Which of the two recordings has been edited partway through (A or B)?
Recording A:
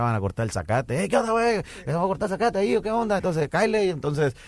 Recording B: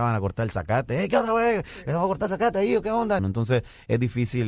B